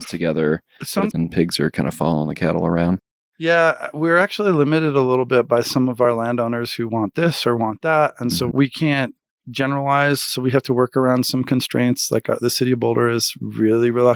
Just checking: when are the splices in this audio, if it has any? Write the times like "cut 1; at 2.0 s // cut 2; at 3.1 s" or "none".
cut 1; at 1.1 s

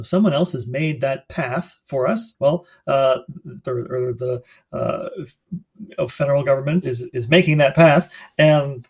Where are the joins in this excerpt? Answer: cut 1; at 2.3 s // cut 2; at 3.6 s // cut 3; at 6.8 s

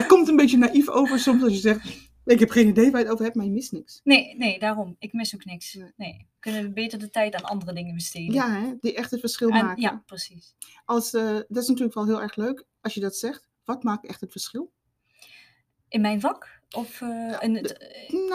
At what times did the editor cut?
none

